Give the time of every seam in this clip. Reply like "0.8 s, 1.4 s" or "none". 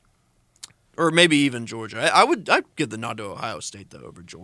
none